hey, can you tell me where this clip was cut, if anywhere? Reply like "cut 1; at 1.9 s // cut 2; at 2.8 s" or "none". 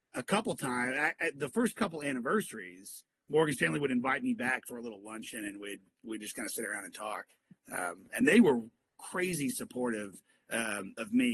none